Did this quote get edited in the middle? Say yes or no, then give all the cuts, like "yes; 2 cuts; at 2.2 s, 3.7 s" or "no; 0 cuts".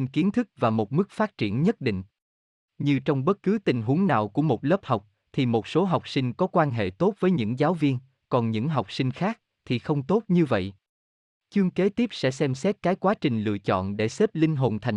no; 0 cuts